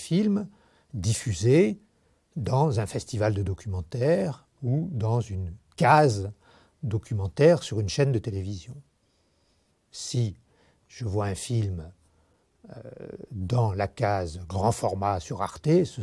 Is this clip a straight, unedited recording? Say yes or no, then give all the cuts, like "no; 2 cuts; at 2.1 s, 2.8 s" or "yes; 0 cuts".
yes; 0 cuts